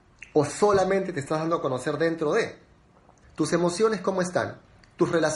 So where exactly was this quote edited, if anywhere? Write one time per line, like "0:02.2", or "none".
0:03.2